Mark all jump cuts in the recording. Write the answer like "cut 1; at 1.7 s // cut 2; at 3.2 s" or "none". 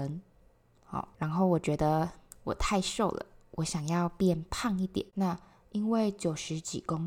cut 1; at 1.1 s // cut 2; at 5.1 s